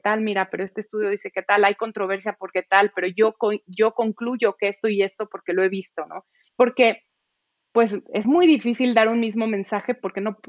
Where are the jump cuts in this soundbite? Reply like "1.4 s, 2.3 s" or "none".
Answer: 6.5 s